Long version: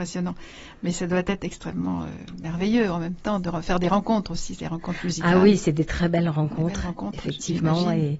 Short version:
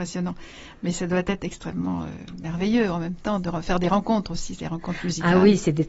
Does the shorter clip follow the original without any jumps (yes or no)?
yes